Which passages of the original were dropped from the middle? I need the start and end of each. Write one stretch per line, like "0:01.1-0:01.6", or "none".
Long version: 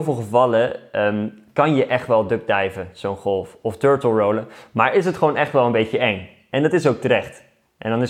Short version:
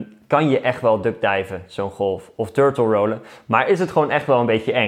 none